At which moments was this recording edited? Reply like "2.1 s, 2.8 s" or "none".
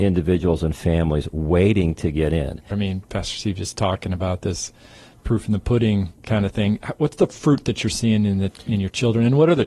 2.7 s